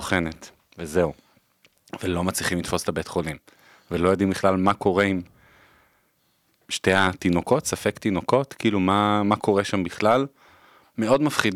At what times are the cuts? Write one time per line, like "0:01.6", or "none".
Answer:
none